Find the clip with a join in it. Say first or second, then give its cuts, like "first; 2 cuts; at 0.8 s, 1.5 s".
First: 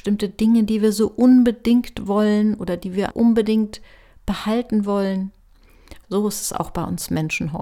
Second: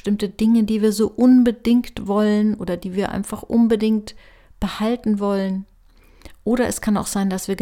first; 2 cuts; at 3.1 s, 6.0 s